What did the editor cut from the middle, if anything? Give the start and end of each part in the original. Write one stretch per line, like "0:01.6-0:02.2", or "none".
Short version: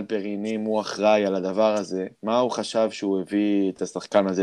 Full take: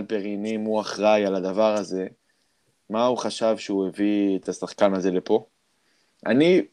0:02.1-0:02.8